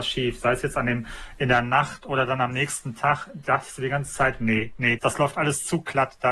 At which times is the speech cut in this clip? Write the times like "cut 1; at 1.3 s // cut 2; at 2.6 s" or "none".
cut 1; at 5.0 s